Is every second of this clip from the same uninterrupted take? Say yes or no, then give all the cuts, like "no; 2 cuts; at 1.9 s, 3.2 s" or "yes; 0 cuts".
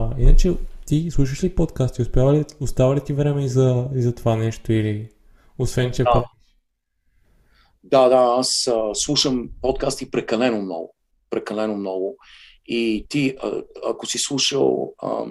yes; 0 cuts